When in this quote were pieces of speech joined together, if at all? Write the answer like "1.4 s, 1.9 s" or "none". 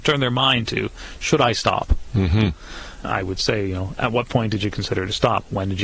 3.0 s